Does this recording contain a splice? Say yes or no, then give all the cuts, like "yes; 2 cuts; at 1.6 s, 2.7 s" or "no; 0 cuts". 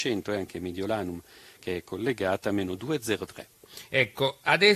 no; 0 cuts